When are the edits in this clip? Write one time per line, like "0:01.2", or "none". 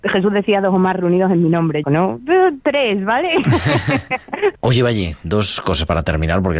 0:01.8
0:04.6